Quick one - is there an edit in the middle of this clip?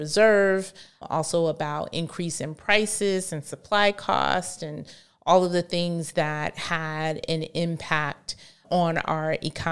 no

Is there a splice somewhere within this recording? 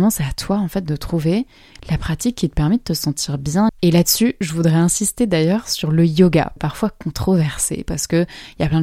yes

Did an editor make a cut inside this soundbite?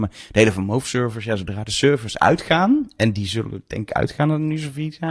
no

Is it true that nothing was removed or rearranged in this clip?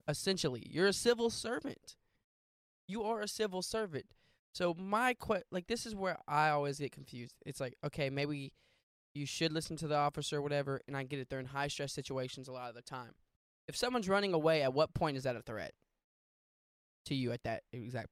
yes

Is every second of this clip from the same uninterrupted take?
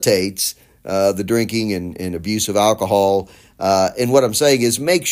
yes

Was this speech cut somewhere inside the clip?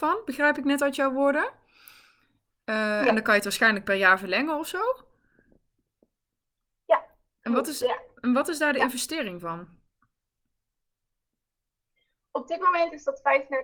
no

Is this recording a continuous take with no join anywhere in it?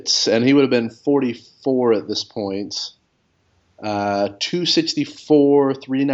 yes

